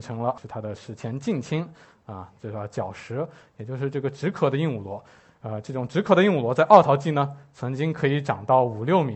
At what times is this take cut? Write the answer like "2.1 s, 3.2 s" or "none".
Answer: none